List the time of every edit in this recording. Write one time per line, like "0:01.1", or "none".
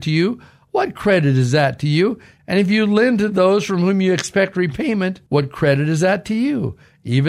0:02.4
0:05.3